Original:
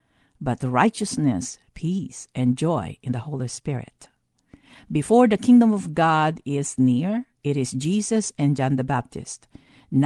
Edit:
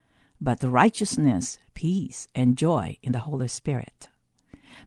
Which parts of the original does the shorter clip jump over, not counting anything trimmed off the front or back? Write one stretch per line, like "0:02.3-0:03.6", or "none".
none